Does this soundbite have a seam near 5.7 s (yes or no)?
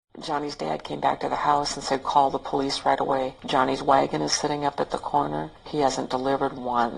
yes